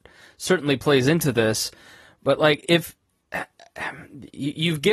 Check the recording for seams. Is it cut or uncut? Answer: uncut